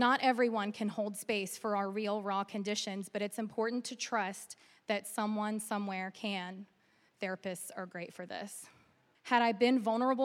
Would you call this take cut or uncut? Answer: cut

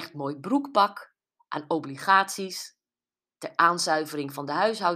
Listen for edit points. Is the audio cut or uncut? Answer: uncut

